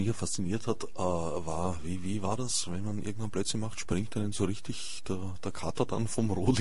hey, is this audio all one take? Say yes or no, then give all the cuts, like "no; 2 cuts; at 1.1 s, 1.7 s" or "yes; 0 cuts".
yes; 0 cuts